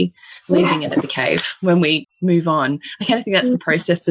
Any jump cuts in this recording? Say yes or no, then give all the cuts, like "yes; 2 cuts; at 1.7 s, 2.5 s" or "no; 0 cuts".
yes; 1 cut; at 2.0 s